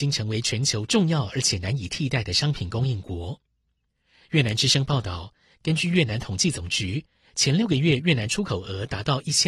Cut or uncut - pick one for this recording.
uncut